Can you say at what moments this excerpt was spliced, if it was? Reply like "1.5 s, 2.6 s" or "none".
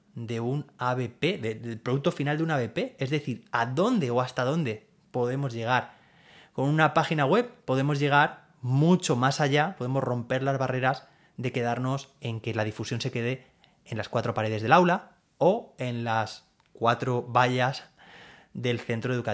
none